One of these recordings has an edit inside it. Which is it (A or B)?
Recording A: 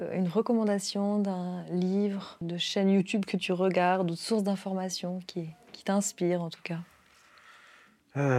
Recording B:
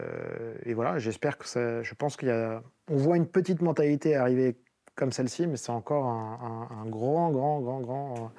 A